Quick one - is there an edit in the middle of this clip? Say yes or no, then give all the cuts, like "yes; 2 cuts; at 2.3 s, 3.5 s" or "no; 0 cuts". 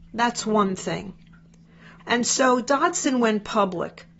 yes; 1 cut; at 2.0 s